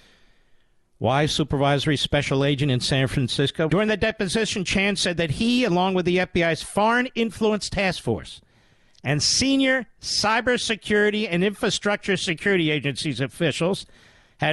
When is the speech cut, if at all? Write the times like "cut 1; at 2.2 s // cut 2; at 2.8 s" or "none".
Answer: cut 1; at 3.7 s